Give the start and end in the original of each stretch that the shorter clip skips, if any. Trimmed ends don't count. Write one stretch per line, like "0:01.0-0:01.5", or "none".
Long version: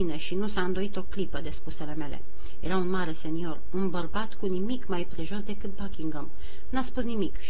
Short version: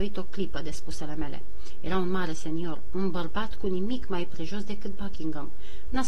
none